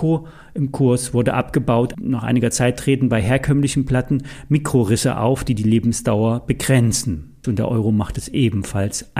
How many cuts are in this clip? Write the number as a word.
two